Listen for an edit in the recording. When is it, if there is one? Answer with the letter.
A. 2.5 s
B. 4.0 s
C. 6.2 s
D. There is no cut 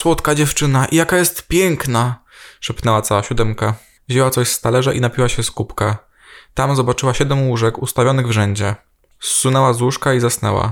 B